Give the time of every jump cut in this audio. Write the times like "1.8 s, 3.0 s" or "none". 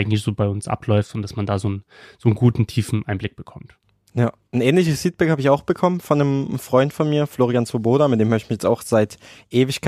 none